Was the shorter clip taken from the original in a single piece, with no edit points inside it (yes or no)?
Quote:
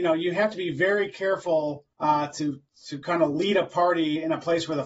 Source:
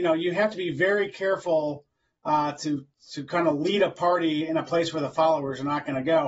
no